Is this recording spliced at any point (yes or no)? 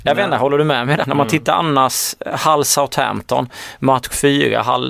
yes